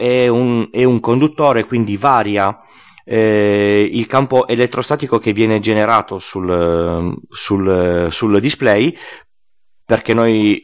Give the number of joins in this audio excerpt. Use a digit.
0